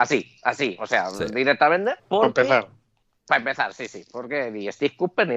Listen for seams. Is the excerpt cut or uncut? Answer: cut